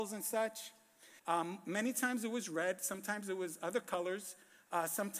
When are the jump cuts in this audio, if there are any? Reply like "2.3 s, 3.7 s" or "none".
1.2 s